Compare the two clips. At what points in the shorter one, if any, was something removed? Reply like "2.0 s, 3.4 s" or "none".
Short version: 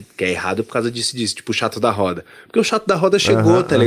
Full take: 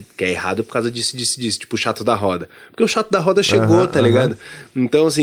1.1 s